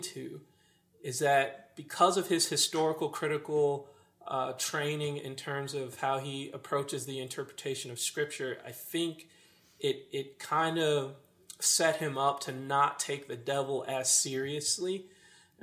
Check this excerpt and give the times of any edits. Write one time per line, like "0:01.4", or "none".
none